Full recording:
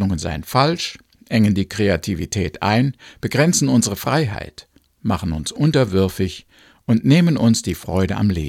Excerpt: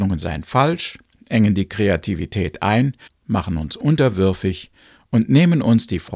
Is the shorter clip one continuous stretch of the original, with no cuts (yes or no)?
no